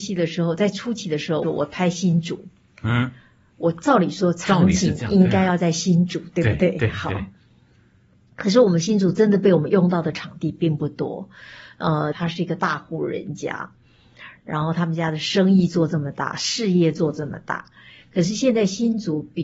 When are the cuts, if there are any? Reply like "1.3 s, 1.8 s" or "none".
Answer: 1.4 s, 12.1 s